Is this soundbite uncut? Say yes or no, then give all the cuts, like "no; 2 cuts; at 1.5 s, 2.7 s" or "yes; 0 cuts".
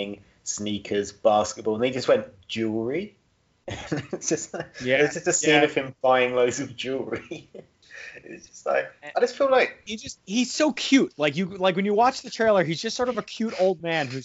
yes; 0 cuts